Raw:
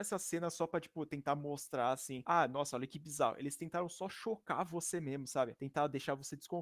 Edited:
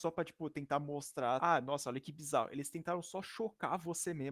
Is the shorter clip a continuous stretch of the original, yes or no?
no